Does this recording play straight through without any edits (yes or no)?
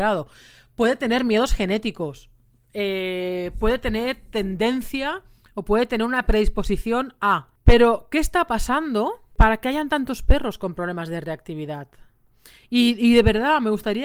yes